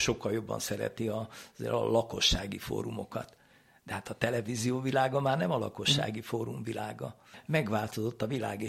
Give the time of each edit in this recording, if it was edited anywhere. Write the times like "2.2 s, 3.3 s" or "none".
none